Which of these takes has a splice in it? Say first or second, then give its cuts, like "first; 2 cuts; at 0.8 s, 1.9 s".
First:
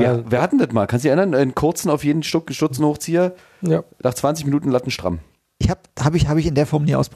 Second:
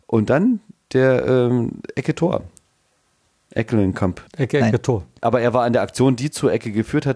second; 1 cut; at 4.3 s